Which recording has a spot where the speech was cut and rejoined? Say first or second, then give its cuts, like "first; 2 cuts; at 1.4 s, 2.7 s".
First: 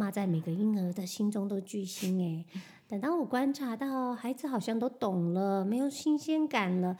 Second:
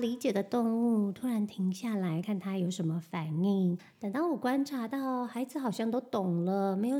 second; 2 cuts; at 2.2 s, 3.8 s